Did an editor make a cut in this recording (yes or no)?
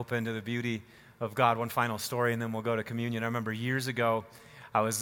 no